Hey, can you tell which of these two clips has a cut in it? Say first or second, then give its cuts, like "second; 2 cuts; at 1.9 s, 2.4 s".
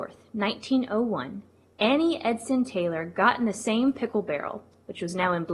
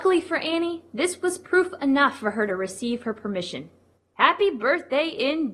second; 1 cut; at 3.9 s